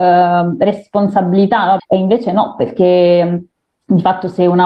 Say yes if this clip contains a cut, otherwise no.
yes